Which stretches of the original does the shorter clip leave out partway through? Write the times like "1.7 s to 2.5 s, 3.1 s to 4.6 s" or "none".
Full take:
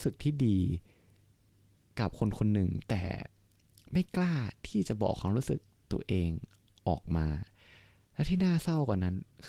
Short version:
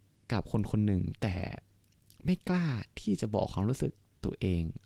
none